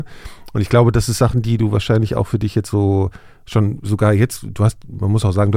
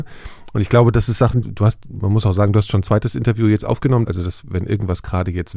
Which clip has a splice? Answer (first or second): second